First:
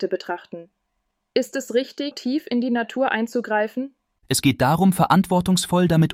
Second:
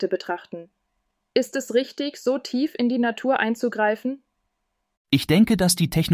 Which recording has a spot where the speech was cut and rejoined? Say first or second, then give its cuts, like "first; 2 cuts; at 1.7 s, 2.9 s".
first; 2 cuts; at 2.1 s, 4.2 s